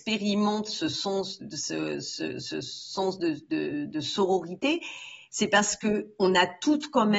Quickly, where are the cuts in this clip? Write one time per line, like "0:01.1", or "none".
0:01.4